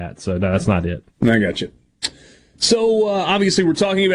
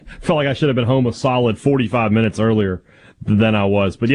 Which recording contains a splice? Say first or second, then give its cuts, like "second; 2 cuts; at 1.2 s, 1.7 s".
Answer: first; 1 cut; at 1.1 s